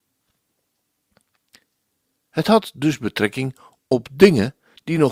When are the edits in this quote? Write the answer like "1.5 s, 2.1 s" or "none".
none